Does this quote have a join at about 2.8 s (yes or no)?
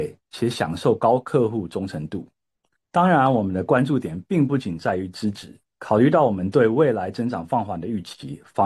no